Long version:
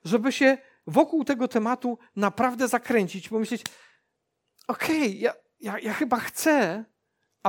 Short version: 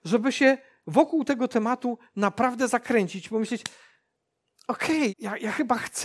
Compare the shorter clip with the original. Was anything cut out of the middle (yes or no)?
yes